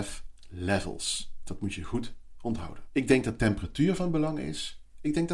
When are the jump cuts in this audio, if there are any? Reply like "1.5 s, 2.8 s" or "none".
2.8 s

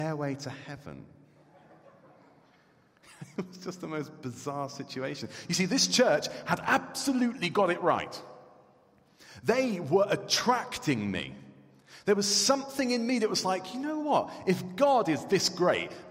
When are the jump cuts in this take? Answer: none

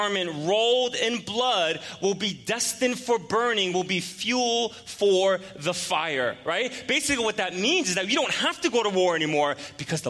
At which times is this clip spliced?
none

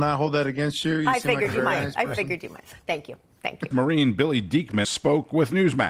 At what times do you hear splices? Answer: 3.7 s, 4.8 s

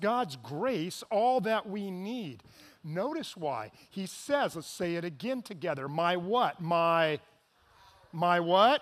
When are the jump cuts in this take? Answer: none

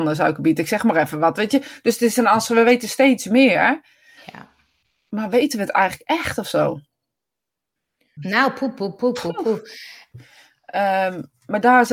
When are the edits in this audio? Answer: 8.2 s, 10.1 s

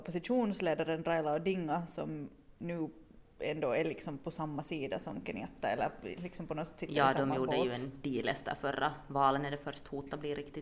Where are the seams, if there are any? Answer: none

